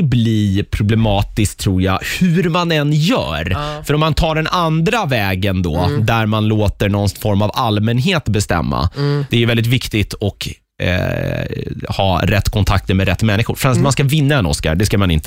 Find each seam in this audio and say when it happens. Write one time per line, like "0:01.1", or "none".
0:09.3